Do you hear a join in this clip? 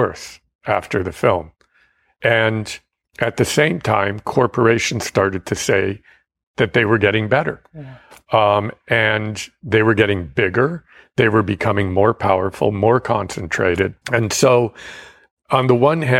yes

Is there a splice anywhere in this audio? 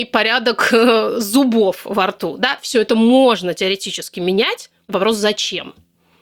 no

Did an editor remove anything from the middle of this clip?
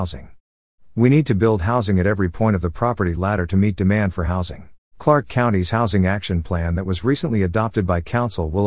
yes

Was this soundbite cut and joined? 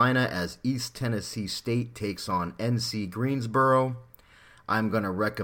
no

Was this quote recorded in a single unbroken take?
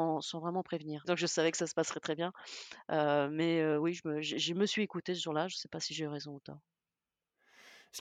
no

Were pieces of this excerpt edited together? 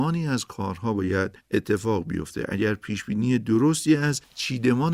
no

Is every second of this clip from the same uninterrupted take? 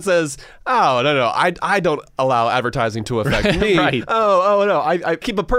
yes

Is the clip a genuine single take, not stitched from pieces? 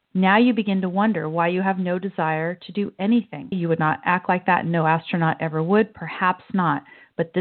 no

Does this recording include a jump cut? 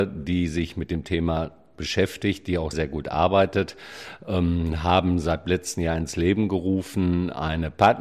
yes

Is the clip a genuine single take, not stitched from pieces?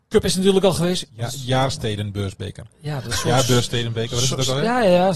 no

